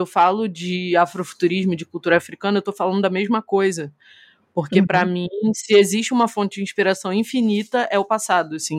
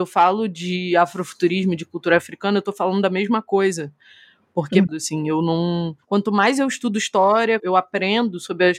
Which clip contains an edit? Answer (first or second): second